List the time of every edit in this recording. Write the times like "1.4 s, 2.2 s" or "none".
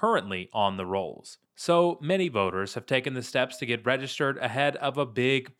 none